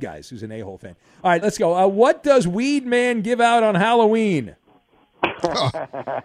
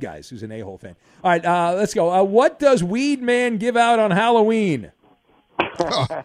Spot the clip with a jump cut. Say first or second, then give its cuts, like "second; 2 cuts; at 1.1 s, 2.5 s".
first; 1 cut; at 1.4 s